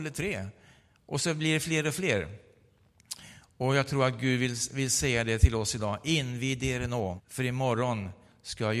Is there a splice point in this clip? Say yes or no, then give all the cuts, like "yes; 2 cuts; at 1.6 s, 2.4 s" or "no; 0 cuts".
yes; 1 cut; at 7.2 s